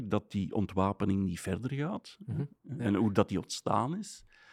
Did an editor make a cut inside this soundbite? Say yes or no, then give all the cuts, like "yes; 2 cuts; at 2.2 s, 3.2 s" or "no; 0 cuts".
yes; 1 cut; at 2.6 s